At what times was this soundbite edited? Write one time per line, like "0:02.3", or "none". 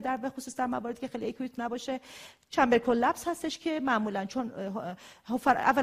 none